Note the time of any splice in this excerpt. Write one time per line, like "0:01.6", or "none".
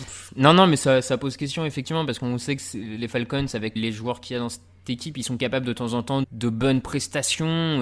0:03.8
0:06.2